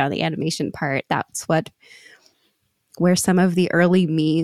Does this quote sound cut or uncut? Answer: cut